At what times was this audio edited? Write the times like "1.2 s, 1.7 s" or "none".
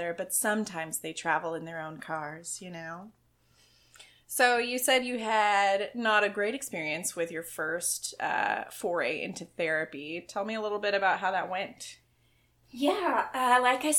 none